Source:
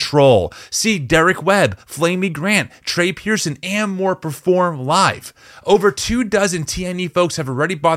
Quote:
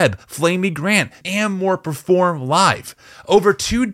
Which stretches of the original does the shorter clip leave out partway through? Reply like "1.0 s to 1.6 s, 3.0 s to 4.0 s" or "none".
2.8 s to 3.6 s